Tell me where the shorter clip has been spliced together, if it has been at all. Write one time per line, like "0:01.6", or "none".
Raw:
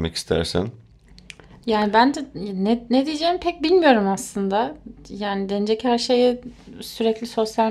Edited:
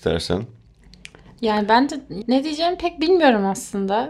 0:02.2